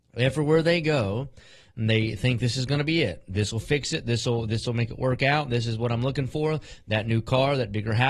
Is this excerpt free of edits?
yes; 0 cuts

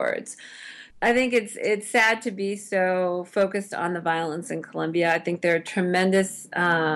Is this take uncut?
no; 1 cut; at 0.9 s

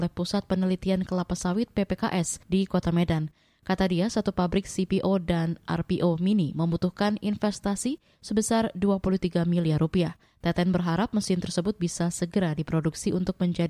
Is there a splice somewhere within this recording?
yes; 1 cut; at 10.2 s

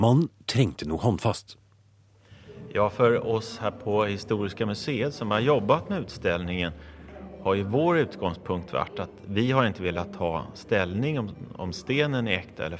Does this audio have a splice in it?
no; 0 cuts

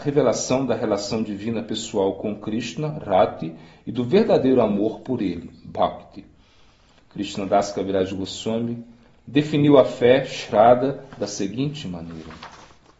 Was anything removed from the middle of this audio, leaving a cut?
no; 0 cuts

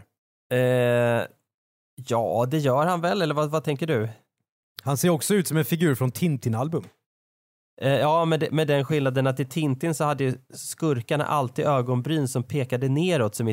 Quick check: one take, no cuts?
yes; 0 cuts

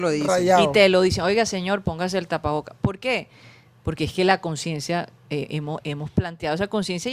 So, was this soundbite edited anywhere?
no; 0 cuts

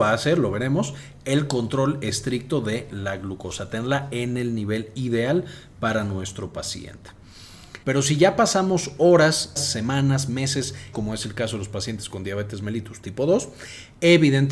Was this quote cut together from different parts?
yes; 3 cuts; at 7.8 s, 9.6 s, 10.9 s

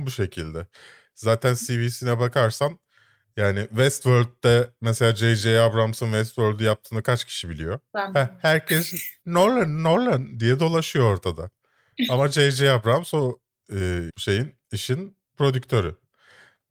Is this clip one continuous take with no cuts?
no; 2 cuts; at 14.1 s, 15.2 s

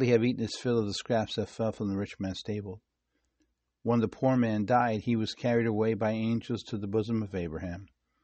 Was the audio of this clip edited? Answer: yes; 1 cut; at 3.7 s

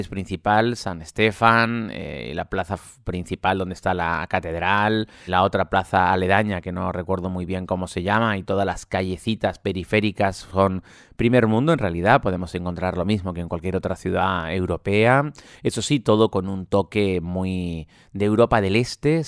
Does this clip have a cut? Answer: yes; 1 cut; at 5.3 s

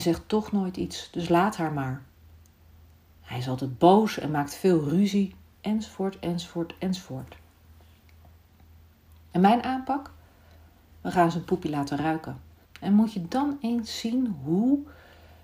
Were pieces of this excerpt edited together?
yes; 1 cut; at 12.6 s

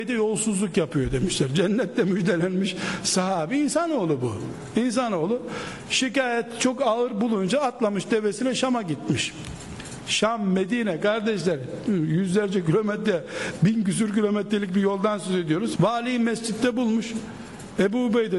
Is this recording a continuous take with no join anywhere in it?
no; 1 cut; at 15.8 s

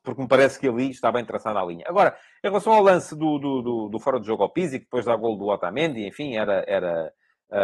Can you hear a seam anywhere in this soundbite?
no; 0 cuts

